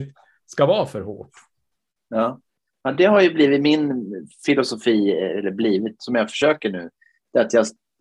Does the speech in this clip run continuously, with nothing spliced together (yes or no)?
yes